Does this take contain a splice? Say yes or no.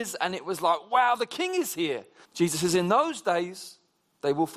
yes